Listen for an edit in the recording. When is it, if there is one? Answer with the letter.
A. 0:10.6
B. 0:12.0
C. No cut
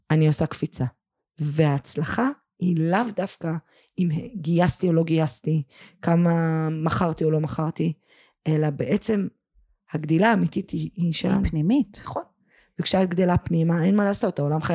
C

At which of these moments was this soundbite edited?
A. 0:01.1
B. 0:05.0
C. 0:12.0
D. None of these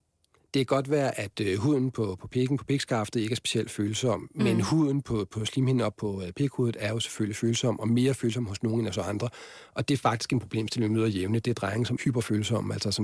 C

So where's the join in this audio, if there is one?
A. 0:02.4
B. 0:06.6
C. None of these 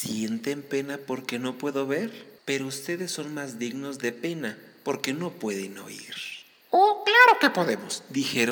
A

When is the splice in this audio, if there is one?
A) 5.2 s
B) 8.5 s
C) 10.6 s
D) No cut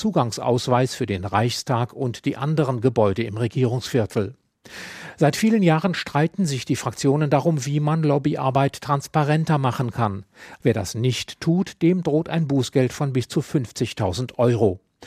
C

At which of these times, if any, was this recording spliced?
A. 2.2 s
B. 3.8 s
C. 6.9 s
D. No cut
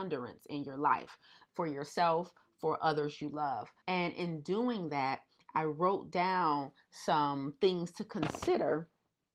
B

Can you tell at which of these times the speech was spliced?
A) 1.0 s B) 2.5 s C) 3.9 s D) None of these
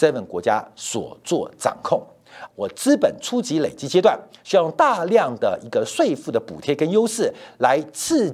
B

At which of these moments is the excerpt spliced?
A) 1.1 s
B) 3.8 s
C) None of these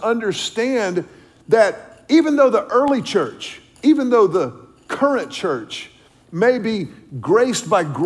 C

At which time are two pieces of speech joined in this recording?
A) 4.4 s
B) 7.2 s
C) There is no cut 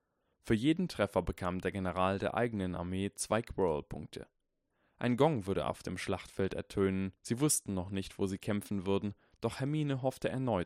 B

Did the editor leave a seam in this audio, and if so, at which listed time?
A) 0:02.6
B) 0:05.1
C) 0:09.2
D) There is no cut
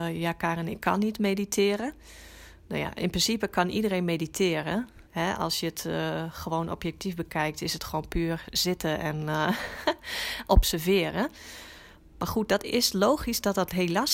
B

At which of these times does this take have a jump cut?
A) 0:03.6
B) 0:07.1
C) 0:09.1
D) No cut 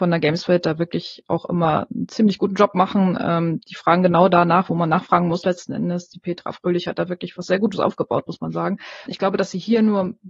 C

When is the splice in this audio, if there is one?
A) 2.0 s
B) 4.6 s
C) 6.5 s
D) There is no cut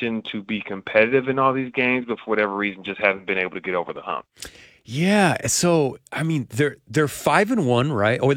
D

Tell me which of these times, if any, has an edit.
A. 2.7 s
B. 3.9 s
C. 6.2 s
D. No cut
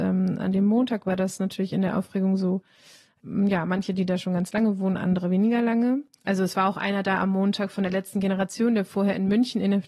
C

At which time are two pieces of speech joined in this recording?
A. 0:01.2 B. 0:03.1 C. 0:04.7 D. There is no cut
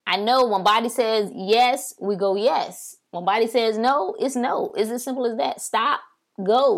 D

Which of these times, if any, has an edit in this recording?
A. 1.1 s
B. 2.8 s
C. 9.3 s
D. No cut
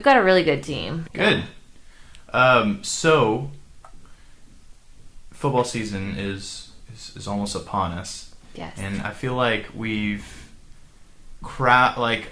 A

